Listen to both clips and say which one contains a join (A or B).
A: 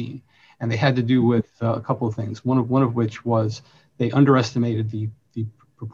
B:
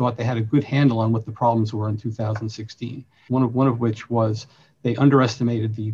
B